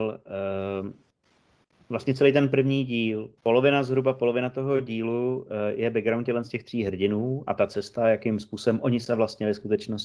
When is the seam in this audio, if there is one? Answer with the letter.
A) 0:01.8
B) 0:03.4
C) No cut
B